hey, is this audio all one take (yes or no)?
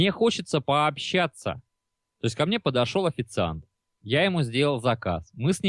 yes